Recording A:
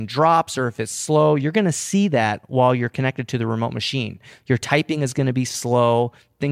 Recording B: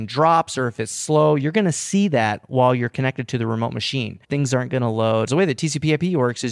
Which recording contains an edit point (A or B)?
B